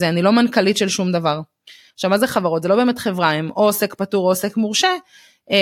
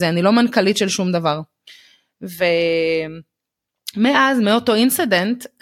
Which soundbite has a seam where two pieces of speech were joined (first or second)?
first